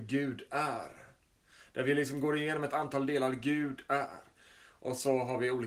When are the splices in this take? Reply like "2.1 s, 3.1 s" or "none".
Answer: none